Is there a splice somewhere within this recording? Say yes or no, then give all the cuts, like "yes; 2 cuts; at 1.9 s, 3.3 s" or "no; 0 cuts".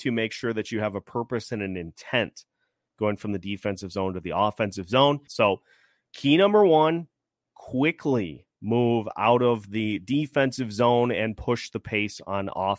yes; 1 cut; at 5.3 s